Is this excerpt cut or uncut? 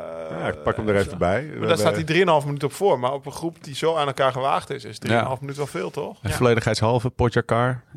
uncut